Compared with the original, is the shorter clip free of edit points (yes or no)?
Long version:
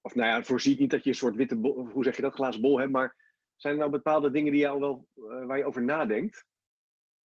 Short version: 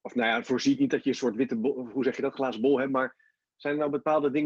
yes